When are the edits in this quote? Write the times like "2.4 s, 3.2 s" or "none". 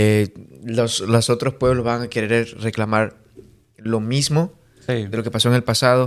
none